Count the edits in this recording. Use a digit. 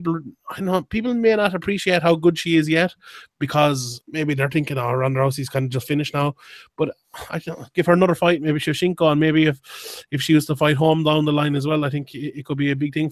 0